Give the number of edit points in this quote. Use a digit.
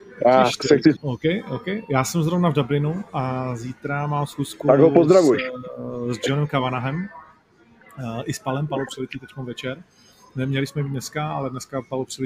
1